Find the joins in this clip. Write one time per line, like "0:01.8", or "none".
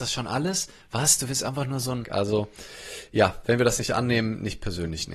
0:02.0